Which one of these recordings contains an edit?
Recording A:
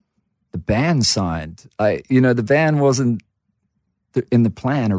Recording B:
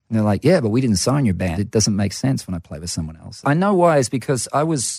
B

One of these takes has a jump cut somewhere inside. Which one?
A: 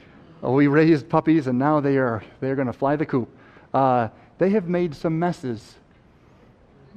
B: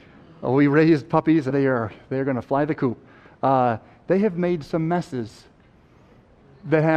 B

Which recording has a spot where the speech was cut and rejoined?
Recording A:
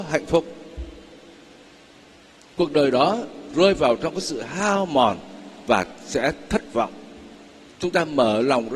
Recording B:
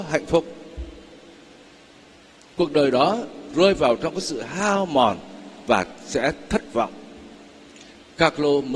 A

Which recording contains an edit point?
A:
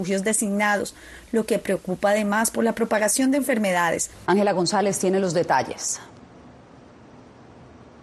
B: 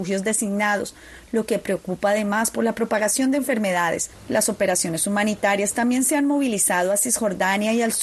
A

